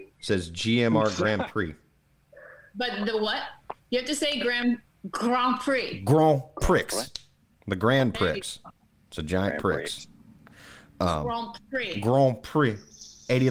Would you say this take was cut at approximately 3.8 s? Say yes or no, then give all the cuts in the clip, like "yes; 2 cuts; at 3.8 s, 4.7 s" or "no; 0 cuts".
yes; 1 cut; at 3.8 s